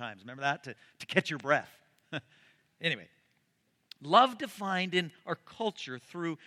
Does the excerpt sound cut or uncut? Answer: uncut